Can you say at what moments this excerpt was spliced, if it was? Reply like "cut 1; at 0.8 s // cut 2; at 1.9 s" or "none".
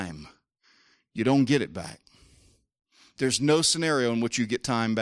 none